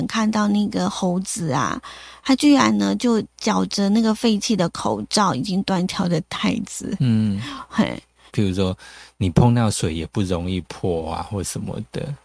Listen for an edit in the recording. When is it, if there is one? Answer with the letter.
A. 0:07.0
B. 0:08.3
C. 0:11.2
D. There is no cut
B